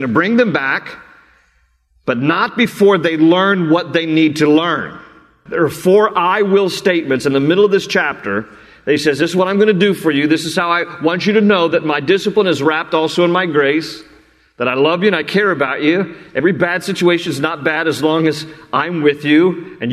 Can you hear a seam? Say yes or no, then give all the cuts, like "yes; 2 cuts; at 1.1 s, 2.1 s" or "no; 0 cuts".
yes; 1 cut; at 5.5 s